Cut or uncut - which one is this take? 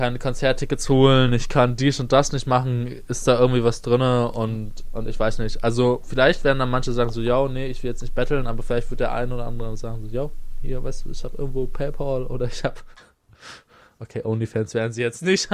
uncut